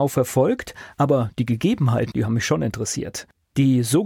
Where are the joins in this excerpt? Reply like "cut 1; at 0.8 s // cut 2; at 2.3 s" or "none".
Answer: cut 1; at 2.1 s